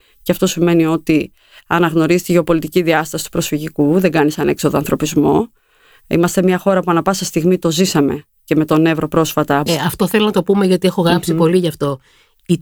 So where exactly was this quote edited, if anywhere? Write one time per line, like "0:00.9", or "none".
0:09.7